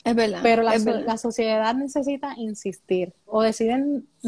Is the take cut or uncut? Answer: cut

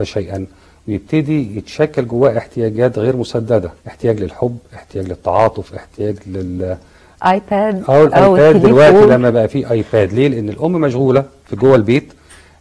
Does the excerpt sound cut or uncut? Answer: cut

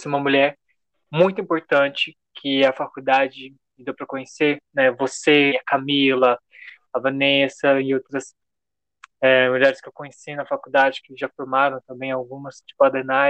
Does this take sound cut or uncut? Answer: cut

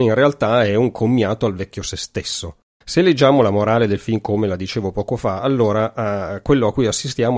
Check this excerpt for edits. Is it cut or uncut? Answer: cut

